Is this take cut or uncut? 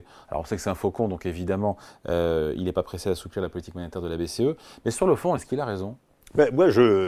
uncut